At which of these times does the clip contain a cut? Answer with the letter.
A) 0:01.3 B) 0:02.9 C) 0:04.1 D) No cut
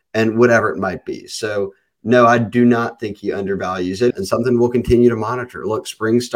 C